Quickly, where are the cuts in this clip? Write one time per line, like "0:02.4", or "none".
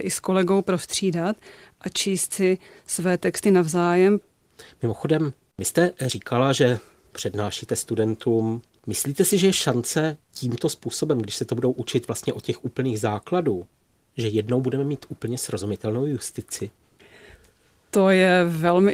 none